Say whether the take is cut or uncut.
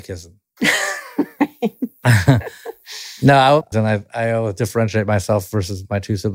cut